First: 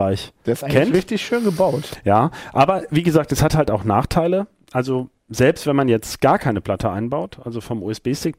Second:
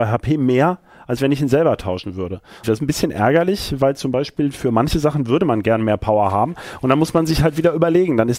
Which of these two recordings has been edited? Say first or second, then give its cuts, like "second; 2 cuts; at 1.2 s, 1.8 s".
second; 1 cut; at 2.6 s